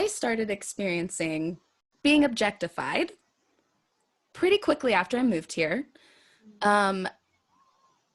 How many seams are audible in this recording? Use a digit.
0